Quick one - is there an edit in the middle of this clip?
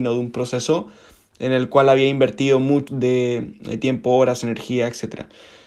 yes; 1 cut; at 2.9 s

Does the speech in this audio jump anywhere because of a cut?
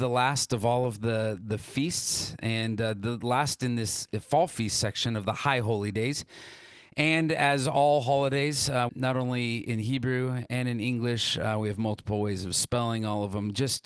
yes; 1 cut; at 8.9 s

